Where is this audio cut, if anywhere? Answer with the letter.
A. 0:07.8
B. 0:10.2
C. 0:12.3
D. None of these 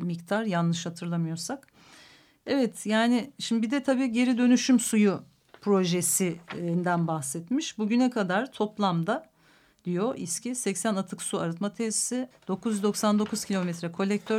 C